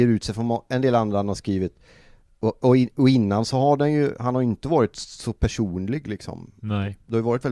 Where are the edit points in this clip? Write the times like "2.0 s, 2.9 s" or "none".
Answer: none